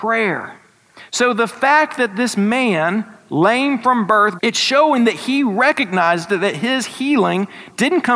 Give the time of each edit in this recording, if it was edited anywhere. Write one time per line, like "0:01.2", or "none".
0:04.4